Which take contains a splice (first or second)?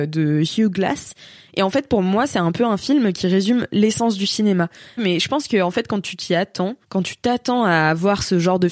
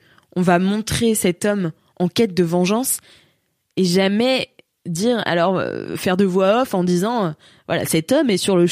first